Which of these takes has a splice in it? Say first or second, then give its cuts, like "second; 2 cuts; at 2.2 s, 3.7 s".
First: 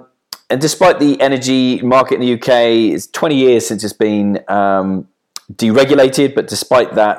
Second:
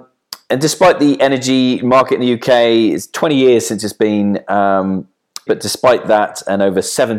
second; 1 cut; at 5.5 s